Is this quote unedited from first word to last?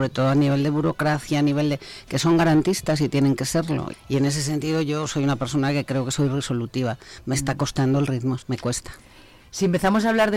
no; 2 cuts; at 3.9 s, 8.4 s

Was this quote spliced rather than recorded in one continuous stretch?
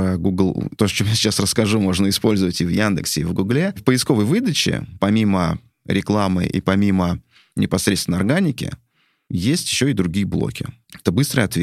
no; 0 cuts

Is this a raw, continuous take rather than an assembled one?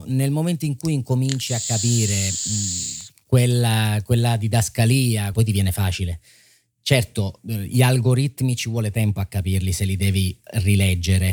no; 1 cut; at 5.3 s

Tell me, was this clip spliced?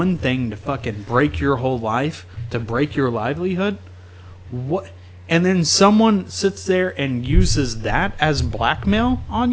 no; 0 cuts

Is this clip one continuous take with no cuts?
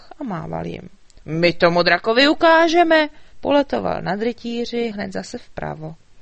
no; 3 cuts; at 1.2 s, 3.3 s, 4.9 s

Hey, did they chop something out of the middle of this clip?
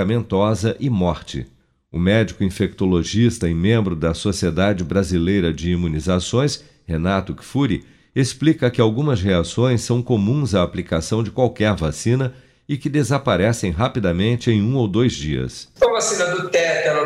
yes; 1 cut; at 15.8 s

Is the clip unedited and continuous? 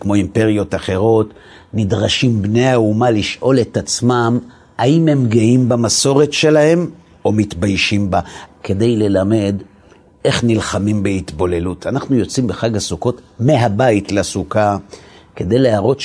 no; 1 cut; at 8.5 s

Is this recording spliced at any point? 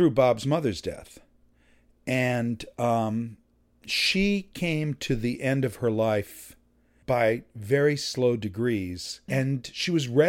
yes; 1 cut; at 9.3 s

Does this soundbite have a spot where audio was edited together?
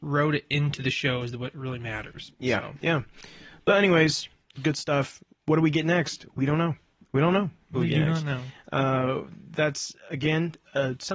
yes; 2 cuts; at 4.5 s, 7.7 s

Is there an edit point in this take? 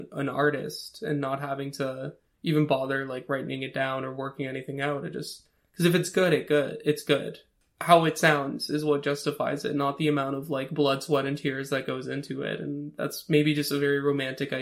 no; 0 cuts

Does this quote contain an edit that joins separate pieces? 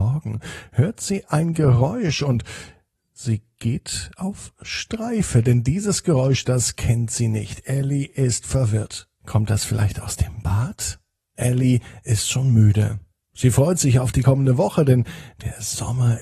yes; 2 cuts; at 9.2 s, 11.3 s

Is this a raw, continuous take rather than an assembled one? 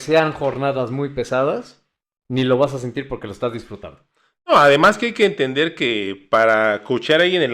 yes; 0 cuts

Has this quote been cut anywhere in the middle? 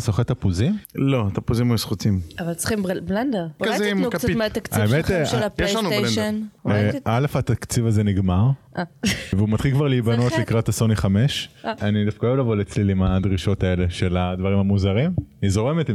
no; 0 cuts

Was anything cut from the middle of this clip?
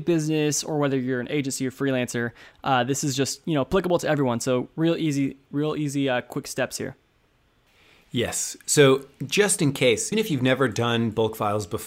yes; 1 cut; at 10.1 s

